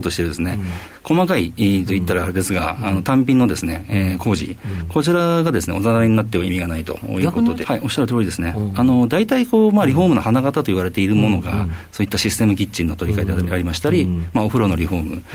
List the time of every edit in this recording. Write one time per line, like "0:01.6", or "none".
0:07.6